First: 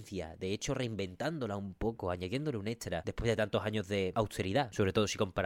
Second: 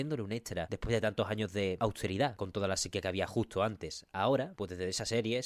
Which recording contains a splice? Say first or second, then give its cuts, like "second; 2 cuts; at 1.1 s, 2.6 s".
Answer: second; 1 cut; at 2.4 s